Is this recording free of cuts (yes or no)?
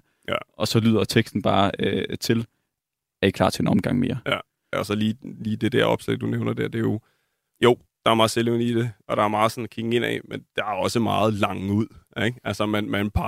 no